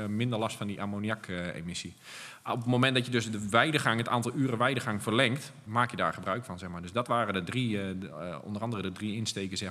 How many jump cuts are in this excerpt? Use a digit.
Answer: 1